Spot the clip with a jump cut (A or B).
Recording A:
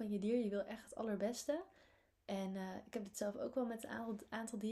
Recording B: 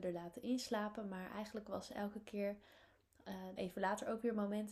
B